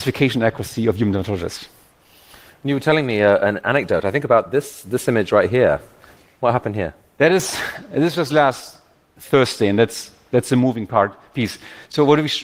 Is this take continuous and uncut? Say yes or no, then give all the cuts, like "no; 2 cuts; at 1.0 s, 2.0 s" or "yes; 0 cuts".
yes; 0 cuts